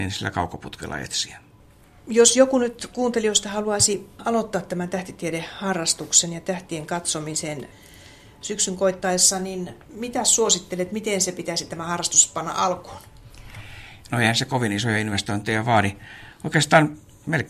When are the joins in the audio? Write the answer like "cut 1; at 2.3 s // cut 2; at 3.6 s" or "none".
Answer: none